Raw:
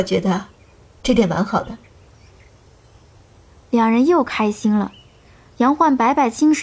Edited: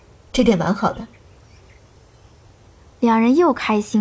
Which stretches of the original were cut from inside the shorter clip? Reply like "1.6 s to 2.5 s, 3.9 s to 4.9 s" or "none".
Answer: none

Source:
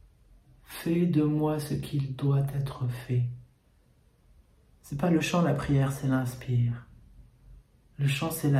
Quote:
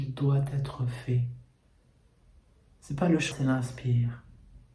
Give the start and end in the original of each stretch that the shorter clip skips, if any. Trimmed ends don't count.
5.3 s to 5.9 s

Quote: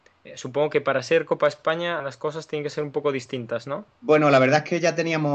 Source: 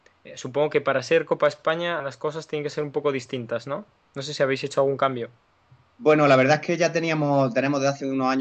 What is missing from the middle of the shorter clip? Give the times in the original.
4.0 s to 5.9 s

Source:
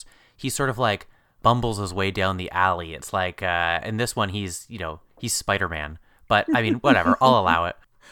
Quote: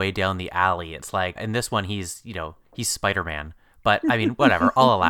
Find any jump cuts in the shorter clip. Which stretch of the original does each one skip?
3.4 s to 3.8 s

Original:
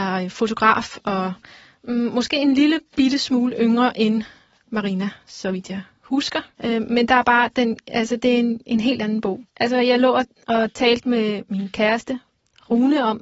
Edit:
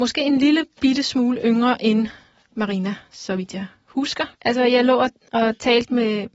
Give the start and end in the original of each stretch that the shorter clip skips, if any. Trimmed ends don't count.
6.5 s to 9.5 s

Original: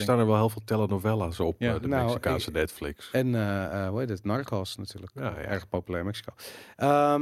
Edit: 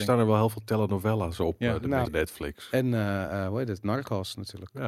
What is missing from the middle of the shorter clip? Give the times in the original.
2.0 s to 2.5 s

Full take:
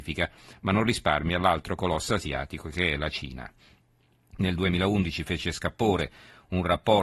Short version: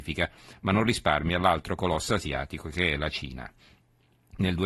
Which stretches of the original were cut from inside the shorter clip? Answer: none

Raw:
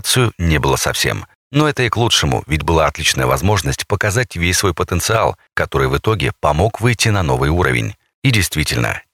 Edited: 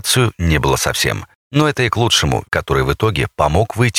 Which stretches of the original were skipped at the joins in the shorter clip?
2.4 s to 5.5 s

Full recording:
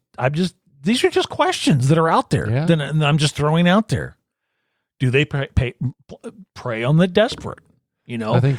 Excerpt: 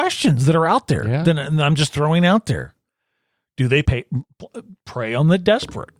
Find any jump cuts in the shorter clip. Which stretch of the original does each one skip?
5.3 s to 5.5 s

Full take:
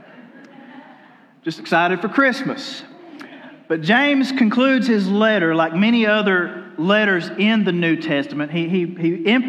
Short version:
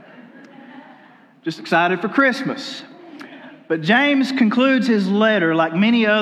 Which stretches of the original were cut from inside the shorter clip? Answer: none

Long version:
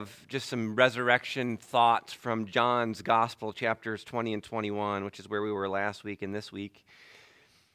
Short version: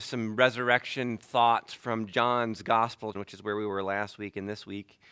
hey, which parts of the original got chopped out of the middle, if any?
3.5 s to 5.0 s

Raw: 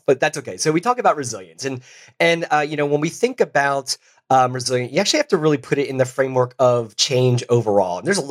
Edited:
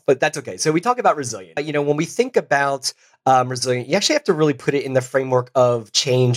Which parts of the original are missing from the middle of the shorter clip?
1.6 s to 2.6 s

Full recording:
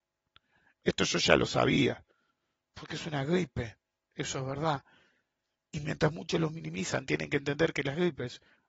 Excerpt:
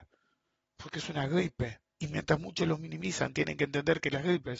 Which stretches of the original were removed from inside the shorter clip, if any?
3.9 s to 5.6 s

